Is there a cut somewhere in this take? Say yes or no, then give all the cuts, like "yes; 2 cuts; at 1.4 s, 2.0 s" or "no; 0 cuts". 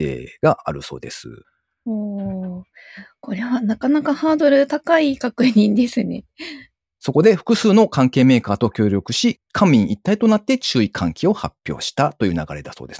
yes; 1 cut; at 7.0 s